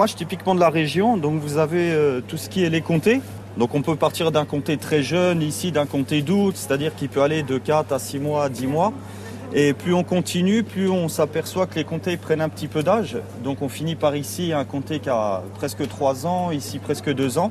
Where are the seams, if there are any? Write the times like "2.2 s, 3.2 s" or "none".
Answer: none